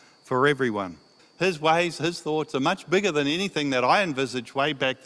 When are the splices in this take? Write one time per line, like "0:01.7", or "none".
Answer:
0:01.2